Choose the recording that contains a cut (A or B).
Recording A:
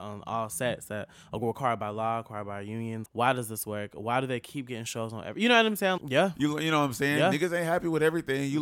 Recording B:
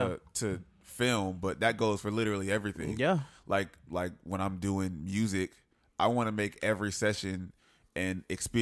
A